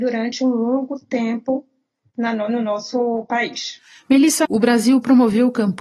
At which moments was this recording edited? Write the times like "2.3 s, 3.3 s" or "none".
4.4 s